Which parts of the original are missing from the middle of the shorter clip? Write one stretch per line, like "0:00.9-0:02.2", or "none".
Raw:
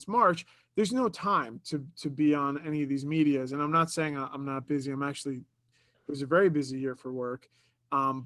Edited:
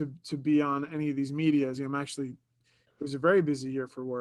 0:03.5-0:04.8